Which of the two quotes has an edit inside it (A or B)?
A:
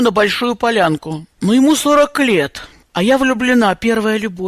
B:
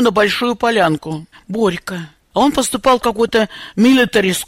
B